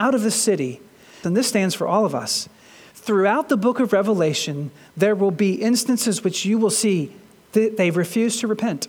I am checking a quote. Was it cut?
yes; 1 cut; at 1.2 s

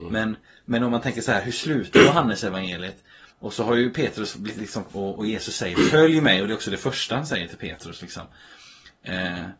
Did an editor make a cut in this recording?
yes; 2 cuts; at 3.3 s, 4.9 s

